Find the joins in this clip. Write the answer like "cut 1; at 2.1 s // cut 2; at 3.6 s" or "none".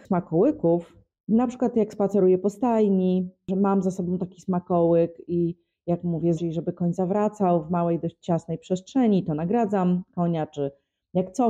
cut 1; at 6.4 s